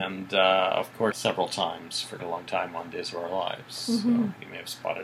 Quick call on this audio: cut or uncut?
cut